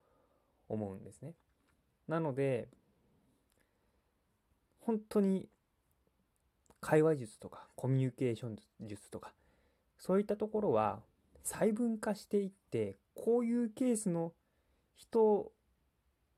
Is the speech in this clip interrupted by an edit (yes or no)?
yes